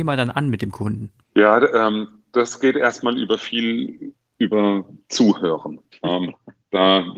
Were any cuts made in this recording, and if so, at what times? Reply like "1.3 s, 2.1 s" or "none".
1.2 s, 5.9 s